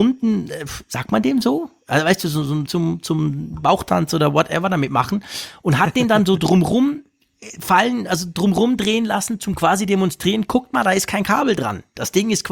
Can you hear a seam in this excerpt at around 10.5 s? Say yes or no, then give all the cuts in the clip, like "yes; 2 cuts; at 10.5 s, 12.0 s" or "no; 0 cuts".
no; 1 cut; at 2.7 s